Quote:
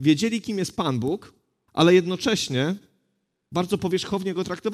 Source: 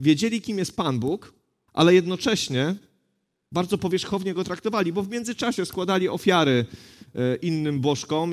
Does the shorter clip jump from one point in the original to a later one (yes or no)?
no